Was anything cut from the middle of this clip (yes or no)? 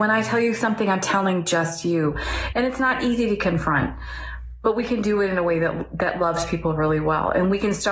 yes